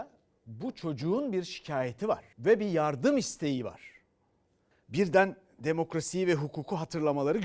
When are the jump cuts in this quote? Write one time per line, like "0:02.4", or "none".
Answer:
0:02.3
0:04.7